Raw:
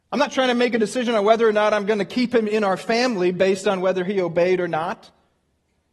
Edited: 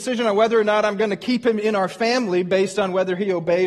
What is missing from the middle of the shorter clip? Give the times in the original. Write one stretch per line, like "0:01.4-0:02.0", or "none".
none